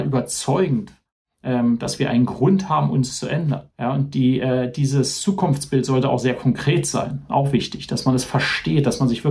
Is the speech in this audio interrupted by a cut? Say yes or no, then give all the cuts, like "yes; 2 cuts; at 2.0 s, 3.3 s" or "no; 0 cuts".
yes; 1 cut; at 3.7 s